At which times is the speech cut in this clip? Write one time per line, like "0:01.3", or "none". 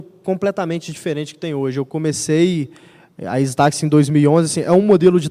none